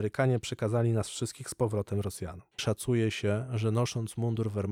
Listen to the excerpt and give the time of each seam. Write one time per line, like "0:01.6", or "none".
0:02.6

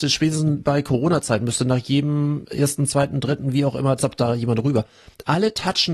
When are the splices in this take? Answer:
0:04.0

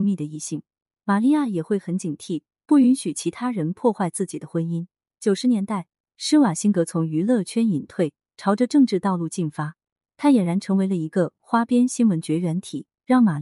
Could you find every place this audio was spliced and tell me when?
none

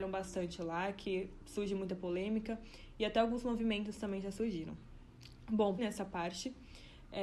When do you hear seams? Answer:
0:05.8

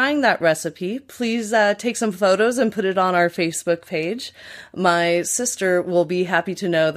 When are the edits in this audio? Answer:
none

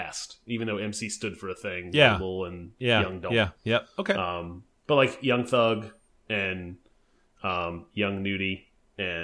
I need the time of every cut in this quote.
none

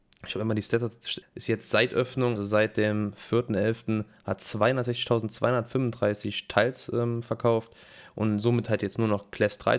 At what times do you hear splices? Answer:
0:01.2
0:02.4

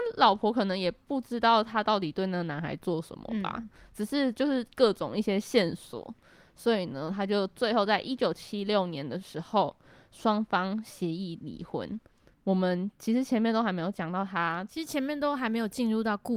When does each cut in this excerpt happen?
0:12.3

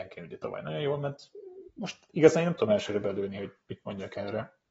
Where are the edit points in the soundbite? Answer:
none

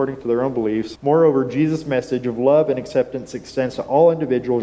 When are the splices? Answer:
0:01.0

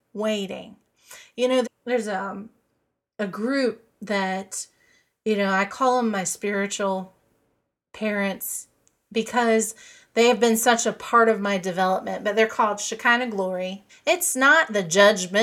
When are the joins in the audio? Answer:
0:01.6
0:13.9

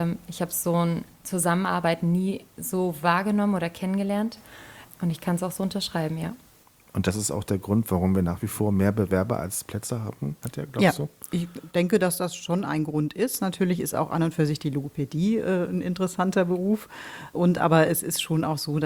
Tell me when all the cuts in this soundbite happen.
none

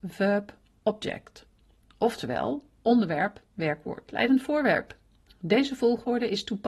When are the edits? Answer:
none

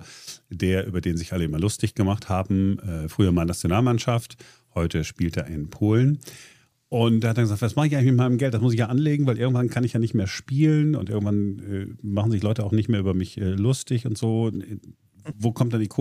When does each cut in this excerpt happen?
none

